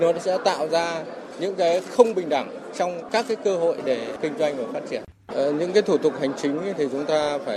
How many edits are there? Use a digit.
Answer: 1